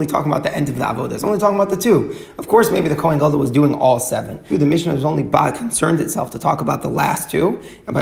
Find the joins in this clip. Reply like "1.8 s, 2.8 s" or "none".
4.5 s